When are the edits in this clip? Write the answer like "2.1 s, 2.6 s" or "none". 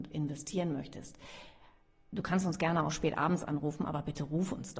none